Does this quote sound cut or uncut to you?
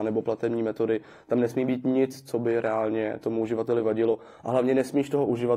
uncut